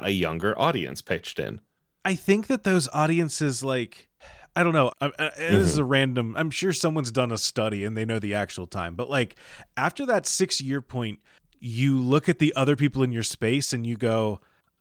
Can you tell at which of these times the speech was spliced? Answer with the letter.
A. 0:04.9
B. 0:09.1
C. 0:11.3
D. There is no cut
A